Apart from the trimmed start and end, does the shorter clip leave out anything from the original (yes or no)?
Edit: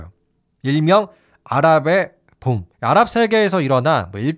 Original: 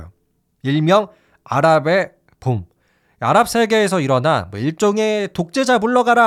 yes